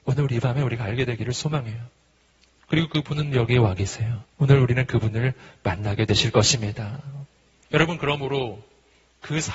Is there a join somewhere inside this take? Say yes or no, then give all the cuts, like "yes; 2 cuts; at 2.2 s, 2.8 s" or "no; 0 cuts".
yes; 2 cuts; at 4.3 s, 7.7 s